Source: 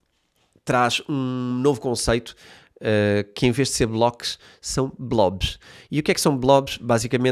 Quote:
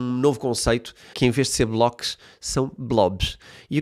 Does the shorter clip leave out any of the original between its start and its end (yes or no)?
yes